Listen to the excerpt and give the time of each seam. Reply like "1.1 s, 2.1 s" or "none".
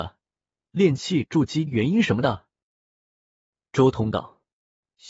1.7 s